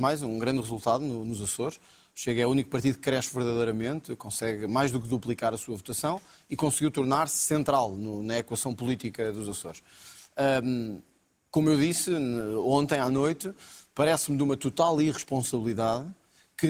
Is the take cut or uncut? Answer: uncut